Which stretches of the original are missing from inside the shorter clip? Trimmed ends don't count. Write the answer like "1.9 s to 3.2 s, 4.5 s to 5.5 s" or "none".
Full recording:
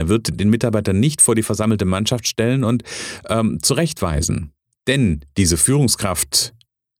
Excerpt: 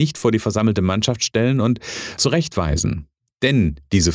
3.2 s to 3.6 s

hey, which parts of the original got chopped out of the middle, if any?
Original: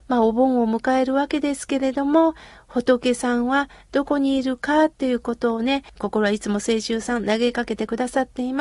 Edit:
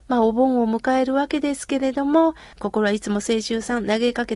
2.5 s to 5.9 s

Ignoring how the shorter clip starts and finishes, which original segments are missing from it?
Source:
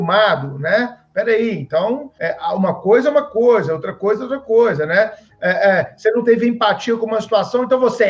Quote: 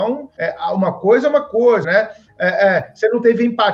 3.7 s to 4.9 s

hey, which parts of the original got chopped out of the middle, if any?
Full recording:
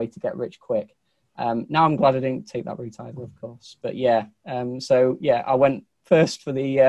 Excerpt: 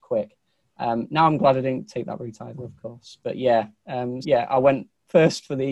4.8 s to 5.2 s

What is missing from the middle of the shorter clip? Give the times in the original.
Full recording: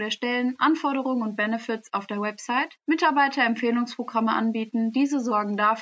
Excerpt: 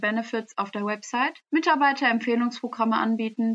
none

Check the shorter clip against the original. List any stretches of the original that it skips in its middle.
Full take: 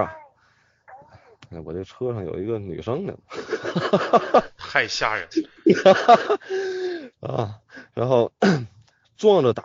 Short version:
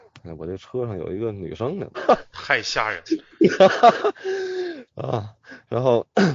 3.2 s to 4.2 s

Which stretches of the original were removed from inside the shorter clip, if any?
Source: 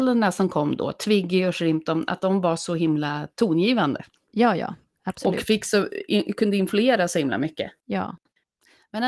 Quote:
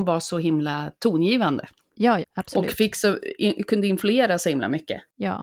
4.6 s to 4.9 s

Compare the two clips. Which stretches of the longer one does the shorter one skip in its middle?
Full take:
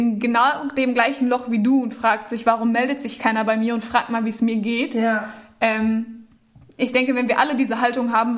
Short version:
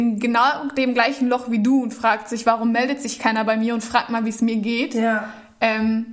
none

